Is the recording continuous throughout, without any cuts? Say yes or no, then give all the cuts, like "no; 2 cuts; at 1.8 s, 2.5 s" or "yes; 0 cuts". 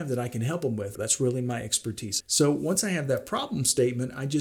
no; 2 cuts; at 1.0 s, 2.2 s